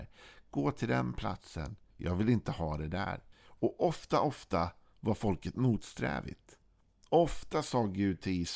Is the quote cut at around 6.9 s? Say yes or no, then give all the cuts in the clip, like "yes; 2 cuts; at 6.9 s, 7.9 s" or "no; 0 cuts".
no; 2 cuts; at 1.9 s, 3.3 s